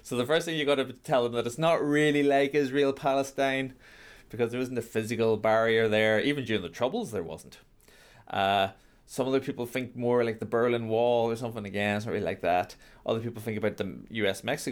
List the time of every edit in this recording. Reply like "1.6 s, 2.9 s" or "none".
none